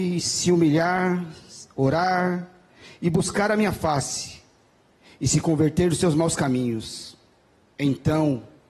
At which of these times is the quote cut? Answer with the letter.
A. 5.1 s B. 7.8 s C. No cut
C